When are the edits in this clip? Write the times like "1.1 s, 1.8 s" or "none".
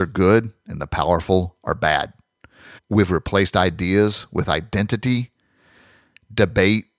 2.8 s